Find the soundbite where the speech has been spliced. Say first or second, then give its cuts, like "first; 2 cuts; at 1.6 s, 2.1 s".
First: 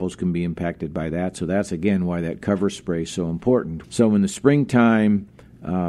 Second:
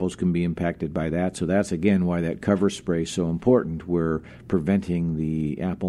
first; 1 cut; at 3.8 s